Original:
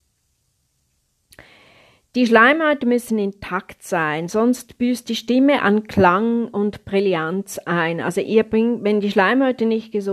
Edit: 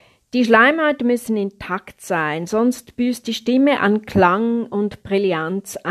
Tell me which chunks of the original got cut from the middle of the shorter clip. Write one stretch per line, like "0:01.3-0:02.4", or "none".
none